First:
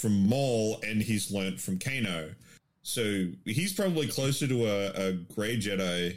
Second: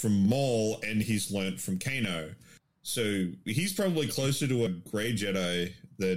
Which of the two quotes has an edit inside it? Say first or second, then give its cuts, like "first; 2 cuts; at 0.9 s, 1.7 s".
second; 1 cut; at 4.7 s